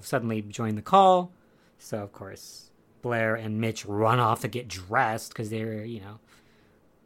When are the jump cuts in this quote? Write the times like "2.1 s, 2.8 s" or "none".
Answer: none